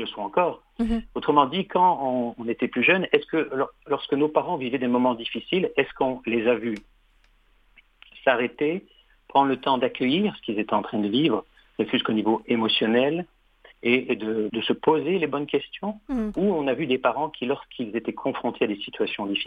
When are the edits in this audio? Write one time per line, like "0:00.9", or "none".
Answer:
0:14.5